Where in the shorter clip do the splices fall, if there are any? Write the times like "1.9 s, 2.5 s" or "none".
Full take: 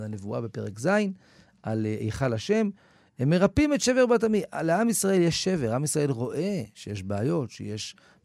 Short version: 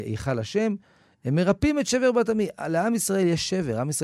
none